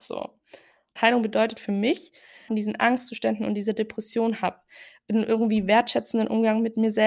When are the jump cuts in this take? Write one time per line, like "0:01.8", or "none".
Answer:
0:01.0
0:02.5